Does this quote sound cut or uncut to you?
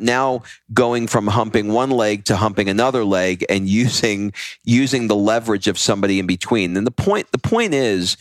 uncut